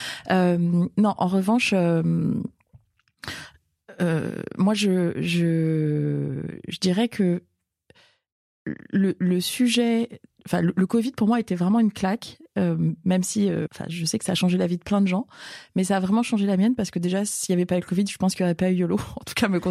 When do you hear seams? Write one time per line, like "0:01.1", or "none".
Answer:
0:13.7